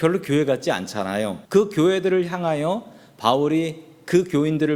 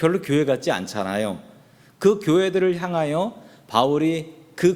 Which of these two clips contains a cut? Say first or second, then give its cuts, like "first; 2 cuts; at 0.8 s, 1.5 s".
first; 1 cut; at 1.5 s